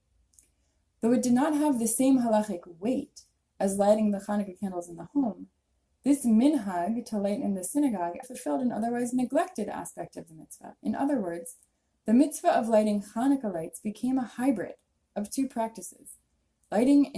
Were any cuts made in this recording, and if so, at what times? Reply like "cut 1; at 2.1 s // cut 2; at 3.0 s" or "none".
cut 1; at 8.2 s